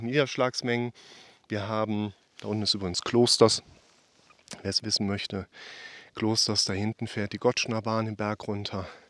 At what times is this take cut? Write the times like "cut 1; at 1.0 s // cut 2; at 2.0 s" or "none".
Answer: none